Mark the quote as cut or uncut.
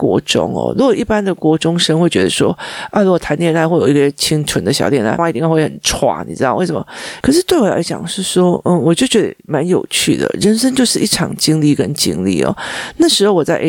cut